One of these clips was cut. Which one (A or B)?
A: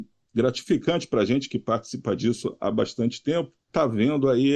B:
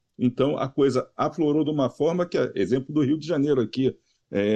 A